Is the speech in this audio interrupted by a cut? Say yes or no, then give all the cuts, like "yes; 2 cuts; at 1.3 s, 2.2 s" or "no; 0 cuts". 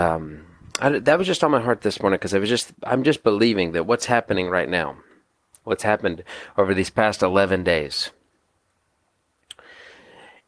no; 0 cuts